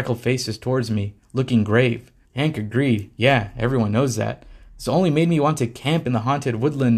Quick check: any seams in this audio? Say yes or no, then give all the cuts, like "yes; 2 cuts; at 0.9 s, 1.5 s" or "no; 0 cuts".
yes; 1 cut; at 2.2 s